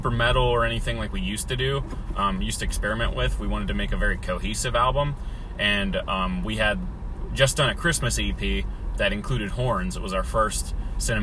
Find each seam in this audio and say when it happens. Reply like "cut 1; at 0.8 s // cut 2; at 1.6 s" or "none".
none